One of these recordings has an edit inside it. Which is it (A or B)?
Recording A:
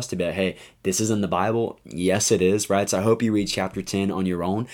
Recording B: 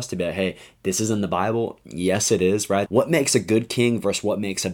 B